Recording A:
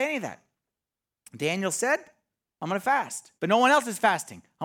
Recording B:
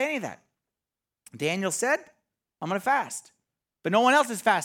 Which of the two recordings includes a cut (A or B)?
A